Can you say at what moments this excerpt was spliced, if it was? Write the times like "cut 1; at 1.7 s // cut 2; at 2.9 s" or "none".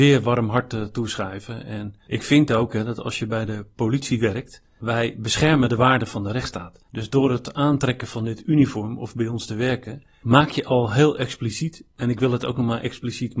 none